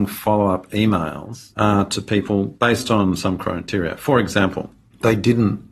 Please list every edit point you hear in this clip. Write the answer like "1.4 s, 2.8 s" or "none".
none